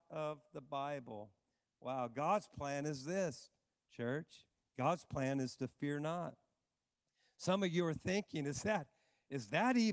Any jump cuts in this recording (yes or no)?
no